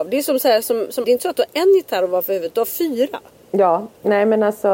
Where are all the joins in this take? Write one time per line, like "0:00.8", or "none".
0:01.0